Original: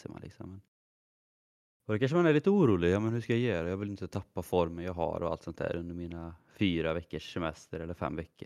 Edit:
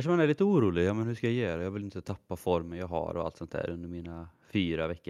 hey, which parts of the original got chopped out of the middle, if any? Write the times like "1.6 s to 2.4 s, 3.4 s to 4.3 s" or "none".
none